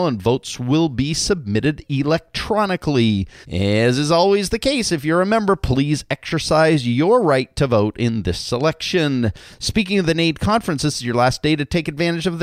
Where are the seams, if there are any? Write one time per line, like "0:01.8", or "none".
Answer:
0:03.4